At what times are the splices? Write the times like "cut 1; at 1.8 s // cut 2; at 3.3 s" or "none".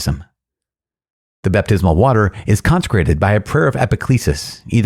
none